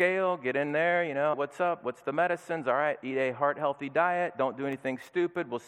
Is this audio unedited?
no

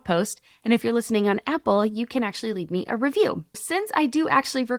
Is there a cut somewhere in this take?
yes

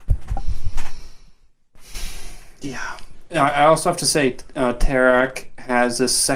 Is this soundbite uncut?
yes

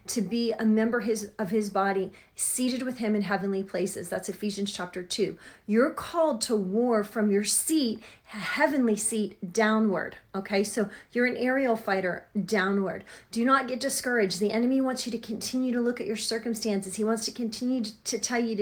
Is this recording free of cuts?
yes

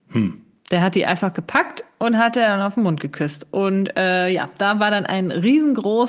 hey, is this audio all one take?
yes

